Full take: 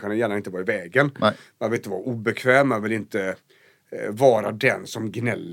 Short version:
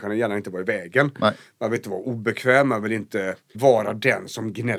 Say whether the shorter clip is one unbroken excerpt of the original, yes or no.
no